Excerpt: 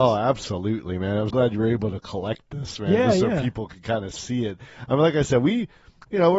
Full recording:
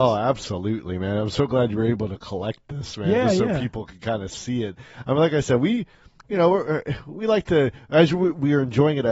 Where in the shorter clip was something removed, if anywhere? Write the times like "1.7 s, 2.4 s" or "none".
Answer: 1.3 s